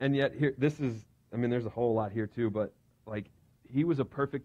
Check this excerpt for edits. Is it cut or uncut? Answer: uncut